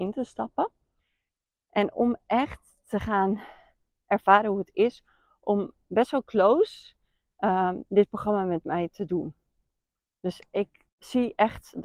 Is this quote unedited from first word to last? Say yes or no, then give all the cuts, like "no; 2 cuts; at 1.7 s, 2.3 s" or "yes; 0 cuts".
no; 1 cut; at 10.9 s